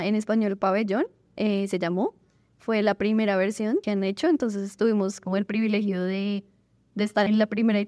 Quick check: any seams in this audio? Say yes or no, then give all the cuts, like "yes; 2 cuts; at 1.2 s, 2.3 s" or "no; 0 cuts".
no; 0 cuts